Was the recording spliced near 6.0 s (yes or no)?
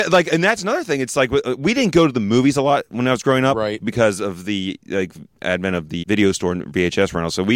yes